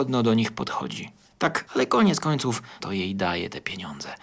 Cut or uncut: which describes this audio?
cut